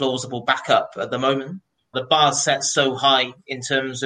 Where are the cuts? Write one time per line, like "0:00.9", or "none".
0:01.9